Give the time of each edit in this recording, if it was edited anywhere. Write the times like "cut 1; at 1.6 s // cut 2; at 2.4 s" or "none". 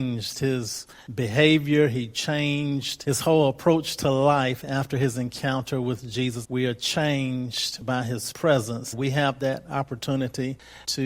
cut 1; at 6.4 s // cut 2; at 8.9 s